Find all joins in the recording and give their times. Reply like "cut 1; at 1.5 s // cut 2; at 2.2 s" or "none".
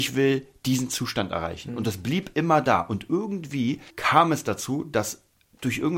cut 1; at 3.9 s